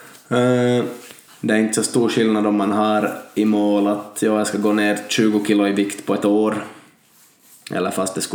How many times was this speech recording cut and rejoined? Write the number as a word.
one